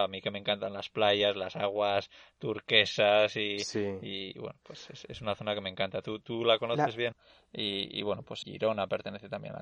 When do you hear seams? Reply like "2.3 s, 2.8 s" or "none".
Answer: 7.1 s, 8.4 s